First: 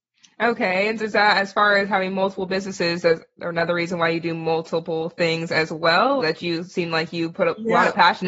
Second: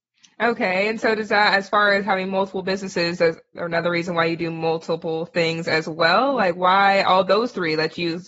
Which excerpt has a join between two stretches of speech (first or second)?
first